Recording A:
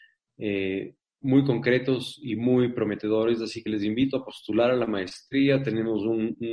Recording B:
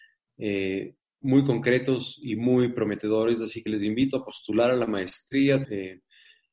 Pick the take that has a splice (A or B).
B